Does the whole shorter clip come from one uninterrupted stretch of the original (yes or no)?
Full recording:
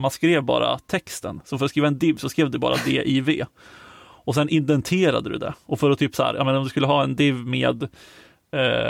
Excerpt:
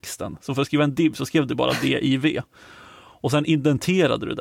yes